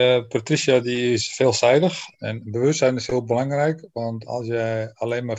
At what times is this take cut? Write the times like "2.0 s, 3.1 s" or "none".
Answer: 2.1 s, 4.3 s